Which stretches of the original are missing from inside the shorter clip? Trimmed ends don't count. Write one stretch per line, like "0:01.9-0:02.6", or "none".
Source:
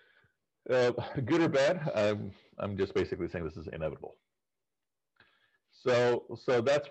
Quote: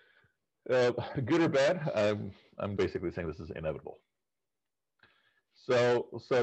0:02.8-0:02.9